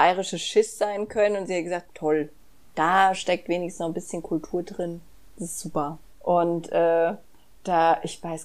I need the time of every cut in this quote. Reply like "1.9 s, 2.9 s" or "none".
1.9 s, 6.1 s